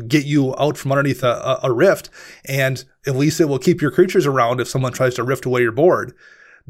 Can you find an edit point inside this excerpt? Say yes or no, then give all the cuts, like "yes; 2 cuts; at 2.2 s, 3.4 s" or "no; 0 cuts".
no; 0 cuts